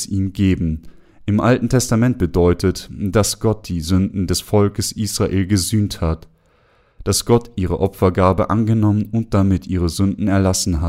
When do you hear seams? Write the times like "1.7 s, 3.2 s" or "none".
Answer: none

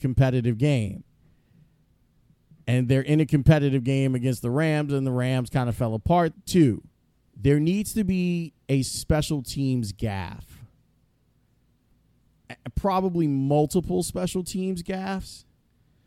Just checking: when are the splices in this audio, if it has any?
6.3 s

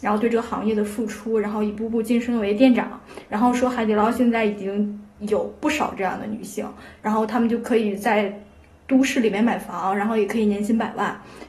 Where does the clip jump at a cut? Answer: none

